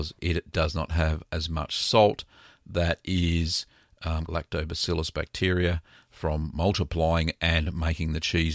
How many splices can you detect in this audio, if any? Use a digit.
1